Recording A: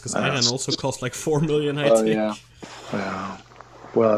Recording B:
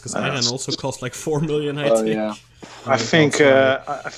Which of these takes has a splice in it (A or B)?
B